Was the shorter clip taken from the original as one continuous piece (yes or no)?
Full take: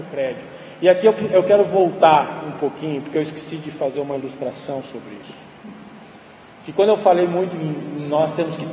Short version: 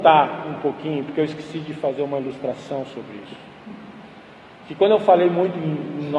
yes